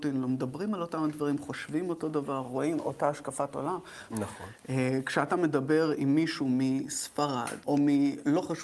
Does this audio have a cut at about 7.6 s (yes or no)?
yes